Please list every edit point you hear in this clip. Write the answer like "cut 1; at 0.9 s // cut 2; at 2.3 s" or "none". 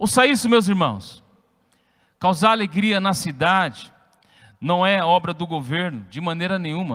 none